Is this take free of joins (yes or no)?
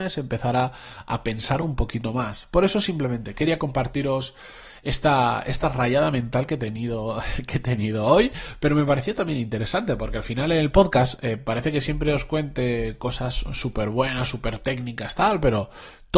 yes